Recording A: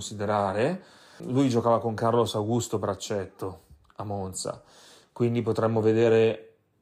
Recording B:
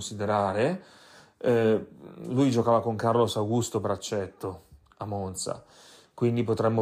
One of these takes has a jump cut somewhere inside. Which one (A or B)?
A